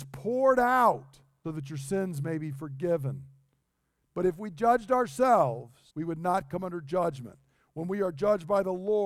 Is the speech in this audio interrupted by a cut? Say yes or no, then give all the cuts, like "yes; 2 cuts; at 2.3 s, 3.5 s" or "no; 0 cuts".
yes; 3 cuts; at 1.4 s, 4.1 s, 5.9 s